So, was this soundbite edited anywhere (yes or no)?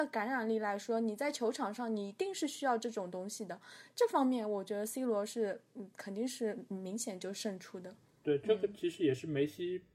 no